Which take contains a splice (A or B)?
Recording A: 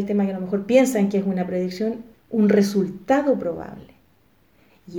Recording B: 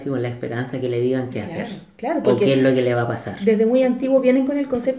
A